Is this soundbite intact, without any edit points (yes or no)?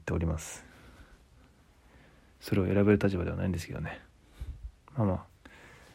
yes